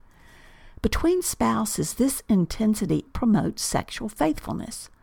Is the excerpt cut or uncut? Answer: cut